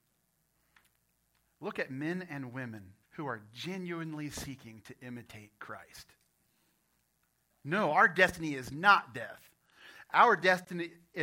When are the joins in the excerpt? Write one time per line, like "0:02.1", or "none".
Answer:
0:03.0
0:07.5